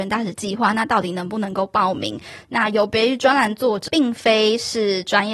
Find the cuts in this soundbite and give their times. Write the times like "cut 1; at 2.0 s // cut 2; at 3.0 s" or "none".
cut 1; at 2.4 s // cut 2; at 3.9 s